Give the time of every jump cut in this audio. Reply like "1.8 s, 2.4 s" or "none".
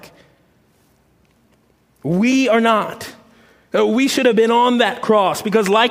none